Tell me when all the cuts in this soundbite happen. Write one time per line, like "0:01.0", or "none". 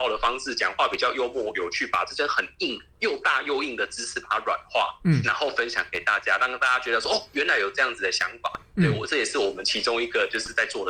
0:07.3